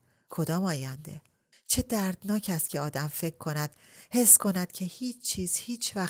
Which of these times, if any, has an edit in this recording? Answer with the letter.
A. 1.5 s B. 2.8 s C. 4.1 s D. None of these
A